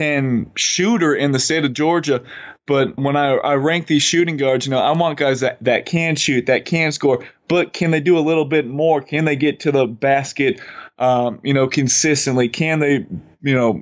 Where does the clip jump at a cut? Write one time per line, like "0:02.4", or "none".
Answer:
0:03.0